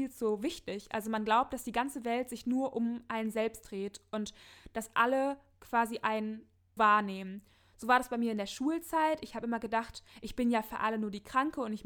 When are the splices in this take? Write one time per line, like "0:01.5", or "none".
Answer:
0:06.8